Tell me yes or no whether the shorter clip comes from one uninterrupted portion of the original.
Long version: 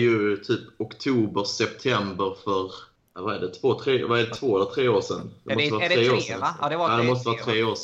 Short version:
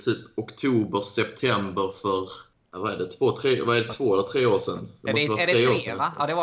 yes